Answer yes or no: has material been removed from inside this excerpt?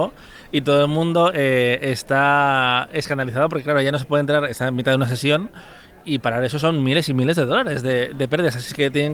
no